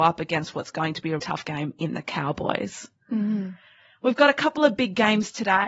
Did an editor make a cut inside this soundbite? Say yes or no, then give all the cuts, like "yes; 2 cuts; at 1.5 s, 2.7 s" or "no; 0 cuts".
yes; 1 cut; at 1.2 s